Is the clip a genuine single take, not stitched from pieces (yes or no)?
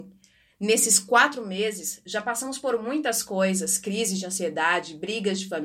yes